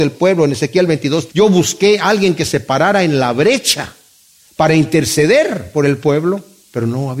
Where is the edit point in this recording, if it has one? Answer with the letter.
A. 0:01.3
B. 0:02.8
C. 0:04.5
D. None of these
A